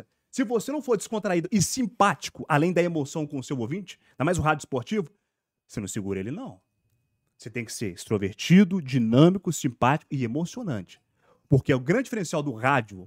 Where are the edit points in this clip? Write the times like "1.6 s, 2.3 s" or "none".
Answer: none